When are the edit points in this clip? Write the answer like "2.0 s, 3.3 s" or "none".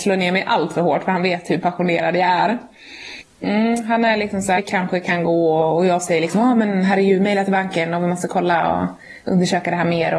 4.6 s